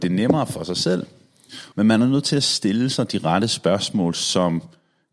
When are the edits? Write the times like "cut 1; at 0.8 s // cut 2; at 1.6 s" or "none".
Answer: cut 1; at 1.7 s